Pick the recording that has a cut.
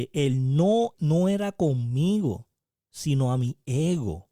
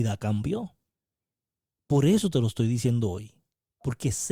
first; 1 cut; at 0.9 s

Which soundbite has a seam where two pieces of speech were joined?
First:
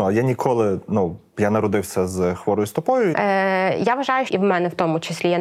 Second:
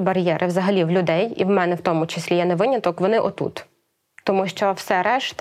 first; 2 cuts; at 3.1 s, 4.3 s

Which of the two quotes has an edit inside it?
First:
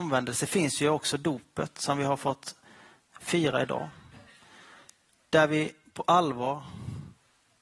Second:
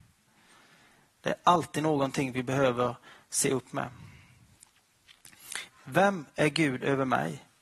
second; 2 cuts; at 1.1 s, 5.7 s

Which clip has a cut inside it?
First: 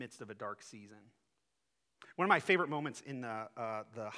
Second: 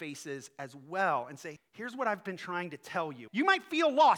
second; 2 cuts; at 1.6 s, 3.3 s

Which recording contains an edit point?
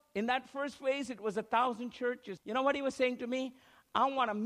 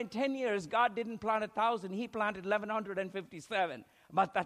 first; 1 cut; at 2.4 s

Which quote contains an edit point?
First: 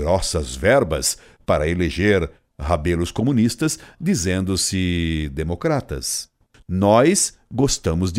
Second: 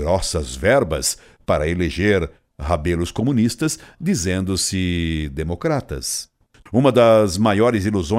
second; 1 cut; at 6.7 s

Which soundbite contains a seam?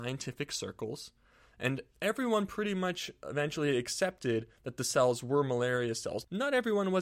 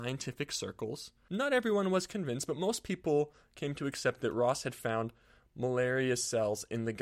second; 1 cut; at 1.3 s

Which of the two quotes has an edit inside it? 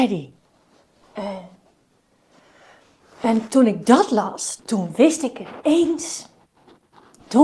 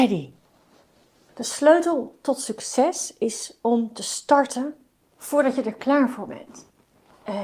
first; 2 cuts; at 1.0 s, 4.6 s

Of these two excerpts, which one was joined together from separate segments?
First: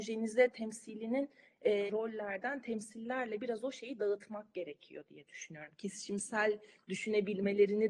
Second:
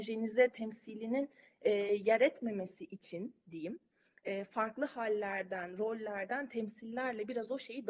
first; 1 cut; at 1.9 s

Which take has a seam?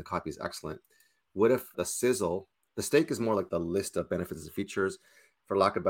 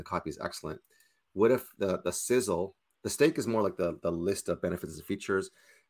first; 2 cuts; at 1.7 s, 3.5 s

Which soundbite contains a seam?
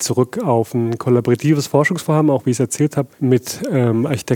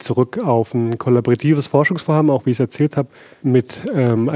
first; 1 cut; at 3.1 s

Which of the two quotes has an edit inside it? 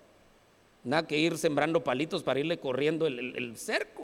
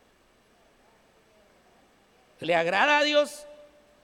second; 1 cut; at 2.4 s

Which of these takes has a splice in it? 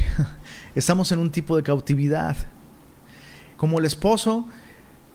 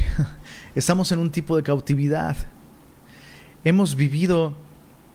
first; 1 cut; at 3.5 s

